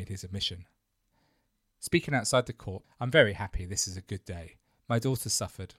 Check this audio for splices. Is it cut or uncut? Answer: cut